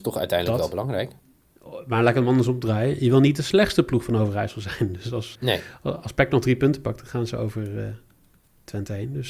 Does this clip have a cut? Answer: yes; 1 cut; at 5.3 s

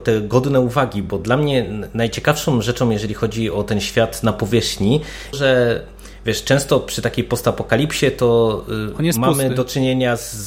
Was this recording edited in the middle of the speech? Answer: yes; 1 cut; at 5.3 s

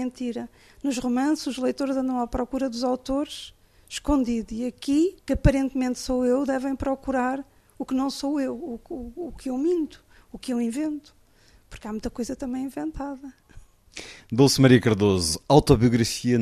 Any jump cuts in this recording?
yes; 1 cut; at 5.2 s

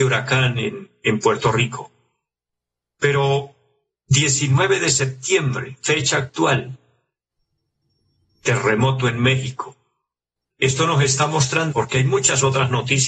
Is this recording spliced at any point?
yes; 2 cuts; at 10.5 s, 11.7 s

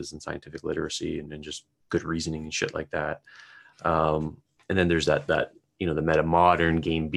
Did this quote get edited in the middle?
no; 0 cuts

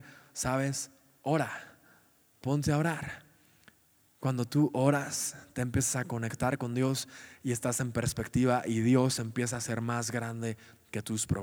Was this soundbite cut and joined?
no; 0 cuts

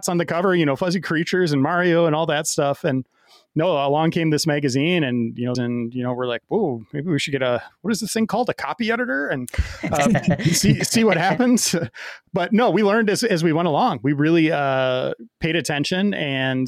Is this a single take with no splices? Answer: no; 1 cut; at 5.5 s

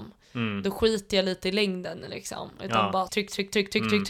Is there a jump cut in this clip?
yes; 1 cut; at 3.1 s

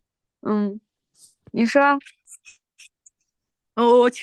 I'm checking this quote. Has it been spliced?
no; 0 cuts

